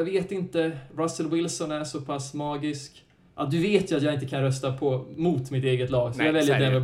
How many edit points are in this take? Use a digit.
1